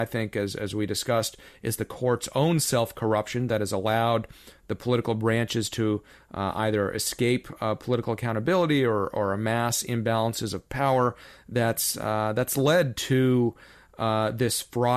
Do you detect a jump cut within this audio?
no; 0 cuts

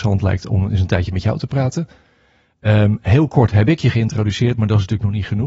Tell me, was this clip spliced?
no; 0 cuts

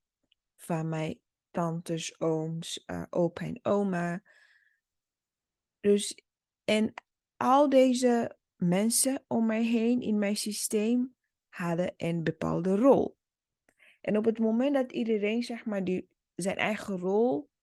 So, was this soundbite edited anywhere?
no; 0 cuts

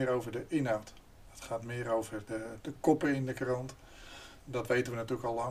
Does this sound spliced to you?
yes; 2 cuts; at 2.6 s, 4.4 s

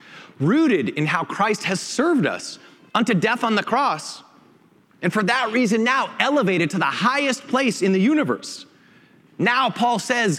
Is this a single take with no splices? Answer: yes; 0 cuts

